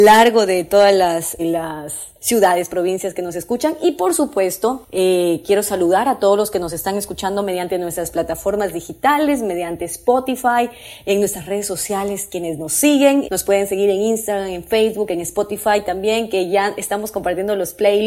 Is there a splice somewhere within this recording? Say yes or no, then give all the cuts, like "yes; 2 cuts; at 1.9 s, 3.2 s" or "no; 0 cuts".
yes; 2 cuts; at 1.4 s, 13.2 s